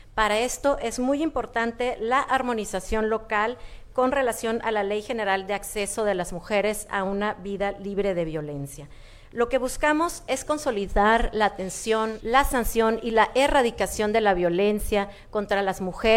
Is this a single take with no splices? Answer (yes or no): no